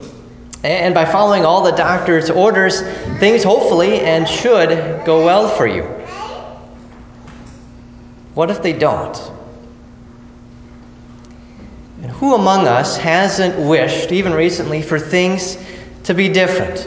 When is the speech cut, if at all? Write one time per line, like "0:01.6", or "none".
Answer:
0:11.9